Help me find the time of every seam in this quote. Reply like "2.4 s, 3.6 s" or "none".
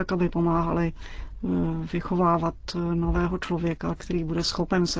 4.0 s